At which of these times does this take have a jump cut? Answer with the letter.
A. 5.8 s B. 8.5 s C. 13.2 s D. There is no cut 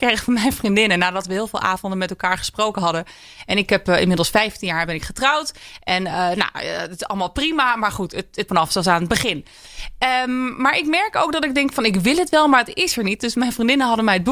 B